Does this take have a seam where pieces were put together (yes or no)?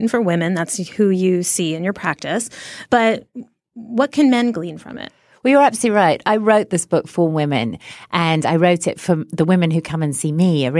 no